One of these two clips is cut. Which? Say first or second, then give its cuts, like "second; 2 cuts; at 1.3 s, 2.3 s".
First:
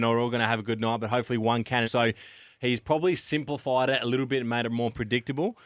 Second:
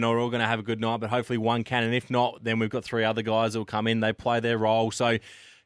first; 1 cut; at 1.8 s